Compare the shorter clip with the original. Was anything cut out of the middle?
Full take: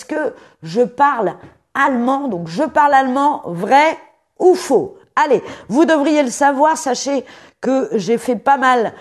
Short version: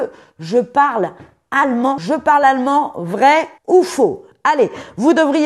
yes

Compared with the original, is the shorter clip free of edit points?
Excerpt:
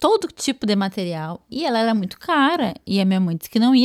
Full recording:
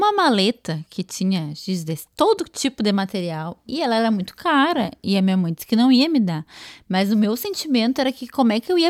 yes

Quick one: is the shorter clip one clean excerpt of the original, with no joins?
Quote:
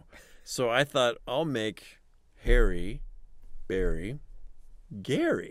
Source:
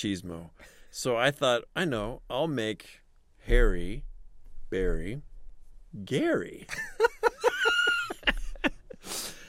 no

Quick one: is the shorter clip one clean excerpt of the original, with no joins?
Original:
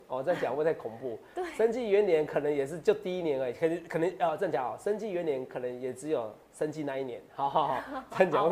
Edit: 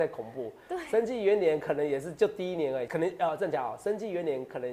no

